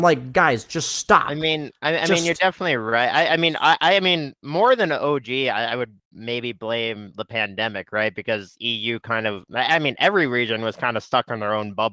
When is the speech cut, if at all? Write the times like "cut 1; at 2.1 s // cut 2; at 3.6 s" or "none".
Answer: none